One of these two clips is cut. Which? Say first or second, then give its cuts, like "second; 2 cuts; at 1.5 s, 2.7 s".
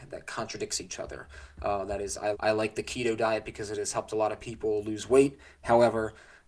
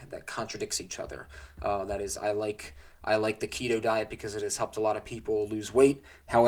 first; 1 cut; at 2.3 s